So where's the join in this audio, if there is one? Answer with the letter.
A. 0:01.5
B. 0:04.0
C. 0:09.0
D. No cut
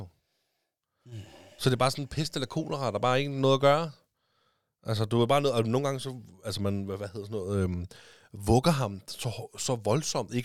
D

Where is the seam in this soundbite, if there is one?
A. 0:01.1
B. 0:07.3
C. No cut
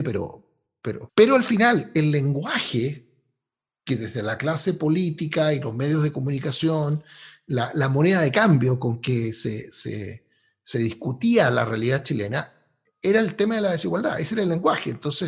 A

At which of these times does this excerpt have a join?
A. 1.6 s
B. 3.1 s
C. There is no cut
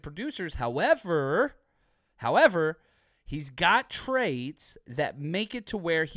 C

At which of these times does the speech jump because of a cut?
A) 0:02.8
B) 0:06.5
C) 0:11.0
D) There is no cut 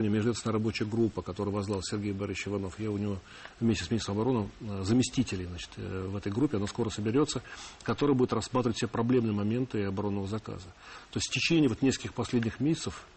D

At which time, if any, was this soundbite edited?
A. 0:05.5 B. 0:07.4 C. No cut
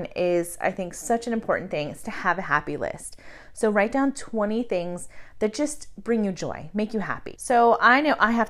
B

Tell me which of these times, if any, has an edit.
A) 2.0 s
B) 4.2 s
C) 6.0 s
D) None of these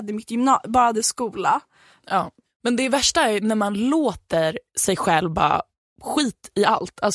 A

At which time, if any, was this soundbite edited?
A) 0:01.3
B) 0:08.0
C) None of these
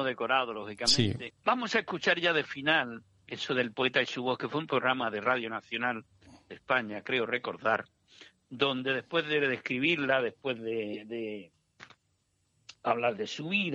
A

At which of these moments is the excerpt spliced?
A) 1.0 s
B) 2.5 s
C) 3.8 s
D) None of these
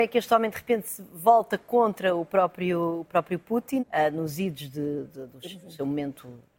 C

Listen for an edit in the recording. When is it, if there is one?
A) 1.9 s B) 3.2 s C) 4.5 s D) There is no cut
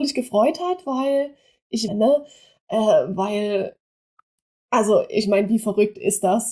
A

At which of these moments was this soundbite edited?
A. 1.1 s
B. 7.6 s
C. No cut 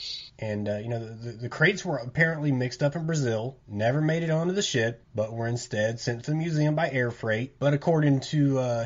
B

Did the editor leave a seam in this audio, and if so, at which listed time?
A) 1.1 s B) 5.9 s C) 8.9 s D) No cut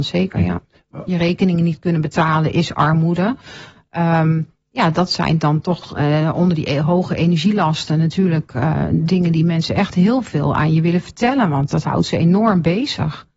A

